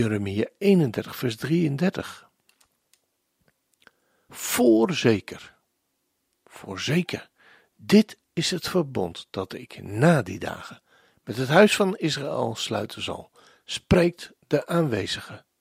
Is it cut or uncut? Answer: cut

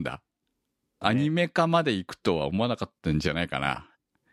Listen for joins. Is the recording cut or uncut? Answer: cut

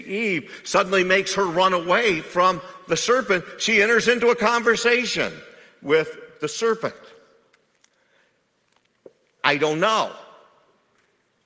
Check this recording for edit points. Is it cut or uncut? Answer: cut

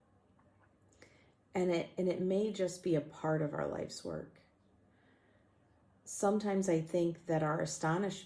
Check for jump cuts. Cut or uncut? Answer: uncut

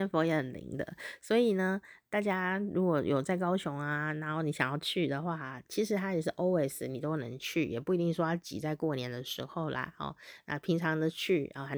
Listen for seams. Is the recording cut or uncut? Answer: uncut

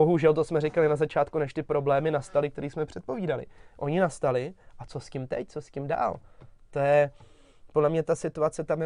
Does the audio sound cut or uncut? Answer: uncut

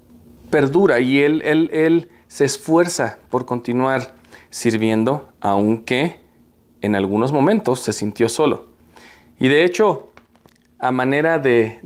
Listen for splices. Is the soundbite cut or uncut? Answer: uncut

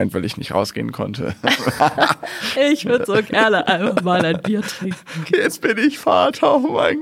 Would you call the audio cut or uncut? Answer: uncut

